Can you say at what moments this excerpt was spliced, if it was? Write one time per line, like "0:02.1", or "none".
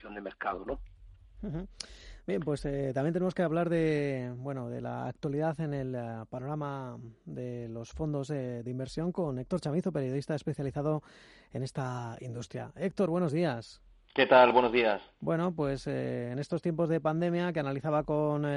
none